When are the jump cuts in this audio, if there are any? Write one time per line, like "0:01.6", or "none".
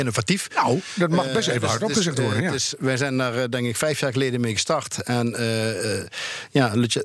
none